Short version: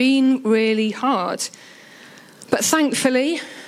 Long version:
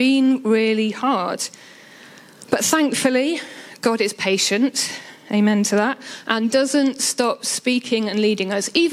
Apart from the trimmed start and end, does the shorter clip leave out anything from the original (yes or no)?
no